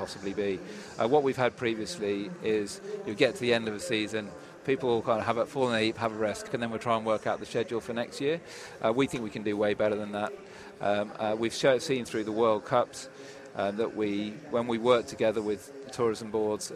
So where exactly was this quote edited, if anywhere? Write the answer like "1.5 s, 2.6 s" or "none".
6.5 s